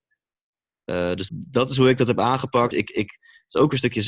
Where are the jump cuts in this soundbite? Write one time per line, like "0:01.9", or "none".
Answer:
0:01.3
0:02.7

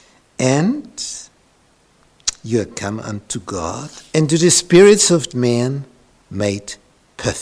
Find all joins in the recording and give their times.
0:04.1
0:05.3

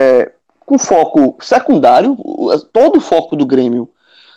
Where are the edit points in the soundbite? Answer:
none

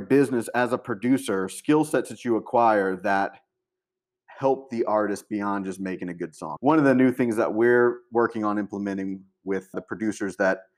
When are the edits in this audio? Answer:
0:06.6
0:09.7

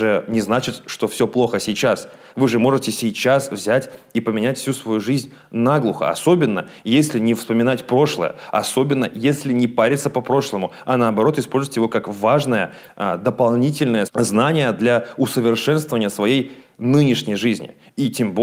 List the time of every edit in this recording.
0:14.1

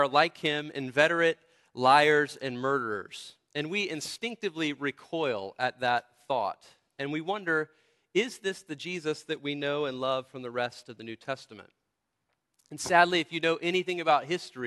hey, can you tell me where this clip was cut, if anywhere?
none

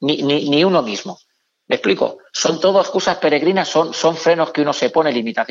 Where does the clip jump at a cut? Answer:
none

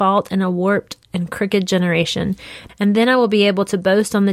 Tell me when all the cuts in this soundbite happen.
0:02.7

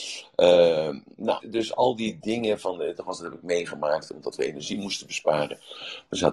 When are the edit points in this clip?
0:01.4
0:03.0

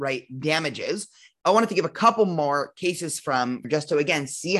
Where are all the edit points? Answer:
0:01.4
0:03.6

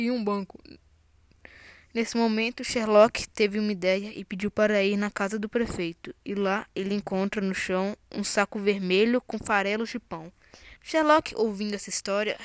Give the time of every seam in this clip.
0:10.8

